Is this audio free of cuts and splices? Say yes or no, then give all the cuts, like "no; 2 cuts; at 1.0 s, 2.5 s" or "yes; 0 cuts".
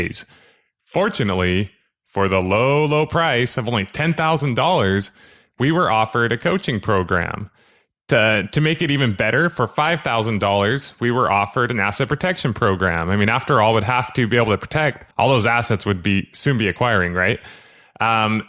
no; 1 cut; at 15.1 s